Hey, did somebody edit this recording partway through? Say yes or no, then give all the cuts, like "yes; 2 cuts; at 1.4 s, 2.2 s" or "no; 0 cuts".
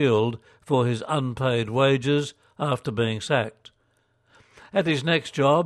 no; 0 cuts